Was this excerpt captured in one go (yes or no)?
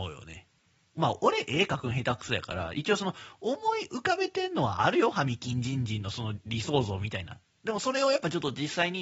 yes